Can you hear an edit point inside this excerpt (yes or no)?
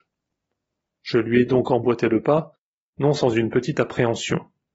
no